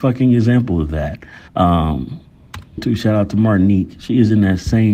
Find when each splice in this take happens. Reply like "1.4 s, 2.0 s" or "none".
1.5 s, 2.8 s